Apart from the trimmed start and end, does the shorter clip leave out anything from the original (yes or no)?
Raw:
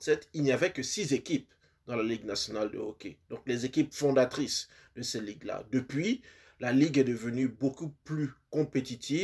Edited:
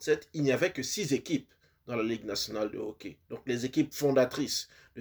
no